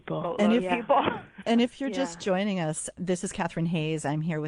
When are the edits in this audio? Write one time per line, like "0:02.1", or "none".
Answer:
0:02.9